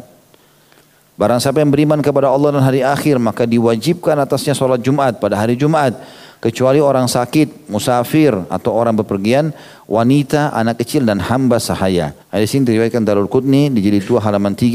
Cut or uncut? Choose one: cut